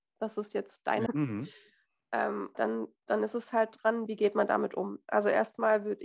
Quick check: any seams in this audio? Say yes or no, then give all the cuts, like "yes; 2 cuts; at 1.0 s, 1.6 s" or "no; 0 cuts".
yes; 3 cuts; at 1.1 s, 2.5 s, 4.1 s